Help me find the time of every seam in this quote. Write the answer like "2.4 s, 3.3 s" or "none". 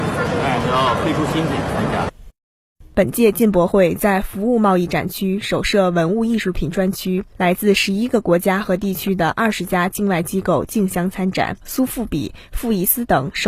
11.6 s